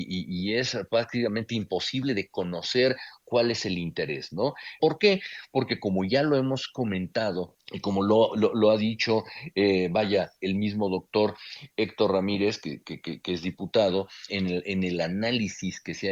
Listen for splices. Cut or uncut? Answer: cut